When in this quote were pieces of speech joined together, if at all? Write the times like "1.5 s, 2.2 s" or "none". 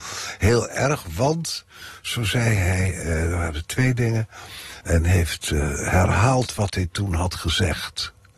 4.8 s